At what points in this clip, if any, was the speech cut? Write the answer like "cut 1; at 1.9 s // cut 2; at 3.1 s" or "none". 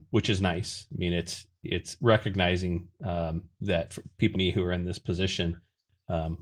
cut 1; at 4.3 s